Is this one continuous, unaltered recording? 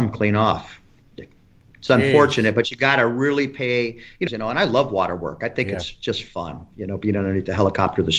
no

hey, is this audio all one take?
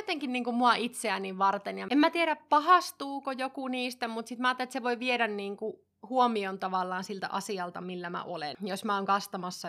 yes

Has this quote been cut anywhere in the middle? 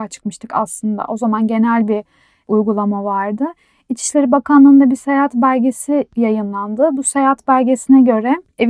no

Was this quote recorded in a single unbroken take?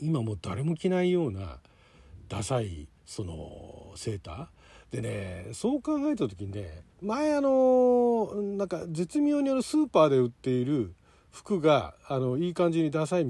no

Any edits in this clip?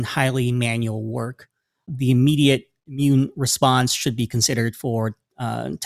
yes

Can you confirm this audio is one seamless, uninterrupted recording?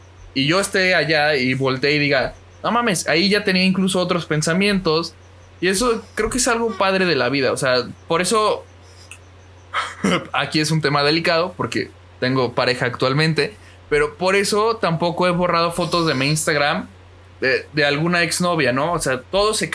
yes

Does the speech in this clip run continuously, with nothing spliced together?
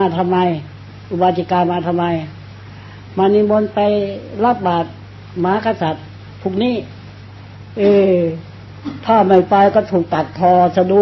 yes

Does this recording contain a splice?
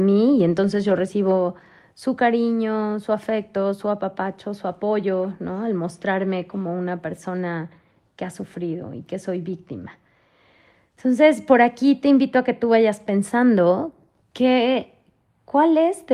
no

